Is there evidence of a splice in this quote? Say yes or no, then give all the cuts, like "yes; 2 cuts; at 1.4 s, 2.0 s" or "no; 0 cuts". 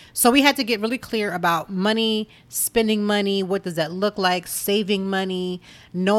no; 0 cuts